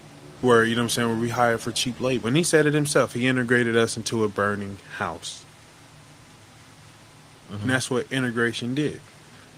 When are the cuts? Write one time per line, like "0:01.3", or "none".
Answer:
0:02.2
0:07.4